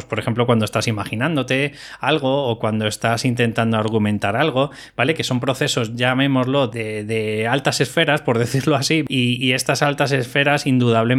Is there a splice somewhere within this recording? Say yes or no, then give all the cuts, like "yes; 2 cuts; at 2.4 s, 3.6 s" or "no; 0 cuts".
no; 0 cuts